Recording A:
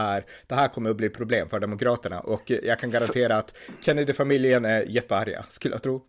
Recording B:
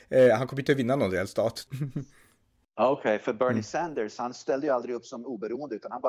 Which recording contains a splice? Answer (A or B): B